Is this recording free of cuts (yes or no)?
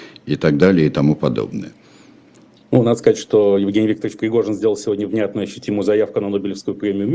yes